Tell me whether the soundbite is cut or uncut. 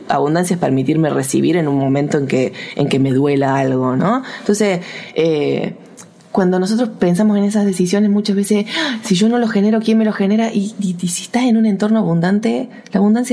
uncut